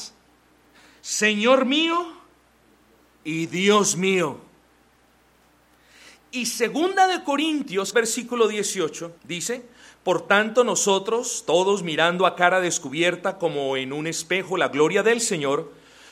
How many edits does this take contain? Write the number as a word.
two